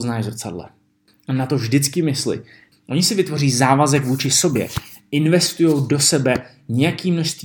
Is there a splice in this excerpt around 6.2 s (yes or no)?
no